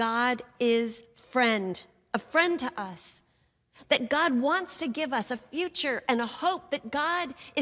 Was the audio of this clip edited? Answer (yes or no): no